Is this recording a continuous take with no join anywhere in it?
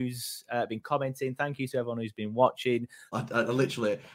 no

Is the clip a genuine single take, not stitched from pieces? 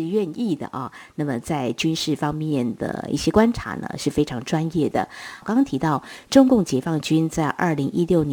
yes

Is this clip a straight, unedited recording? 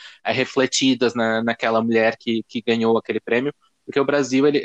yes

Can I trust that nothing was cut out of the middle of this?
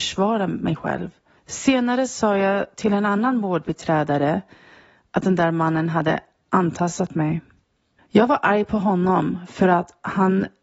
no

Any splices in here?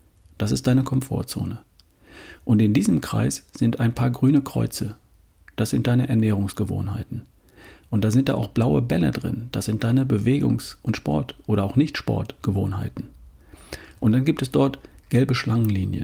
no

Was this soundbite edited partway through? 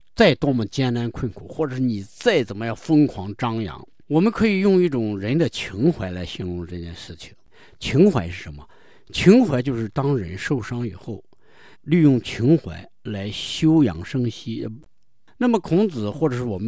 yes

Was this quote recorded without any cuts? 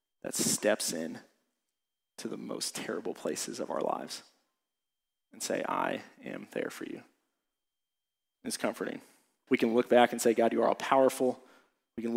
no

